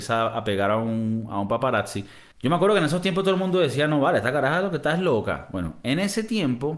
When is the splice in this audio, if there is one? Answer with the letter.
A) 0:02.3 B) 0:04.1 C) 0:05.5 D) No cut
A